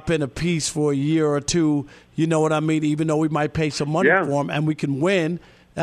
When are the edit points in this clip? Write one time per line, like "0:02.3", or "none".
none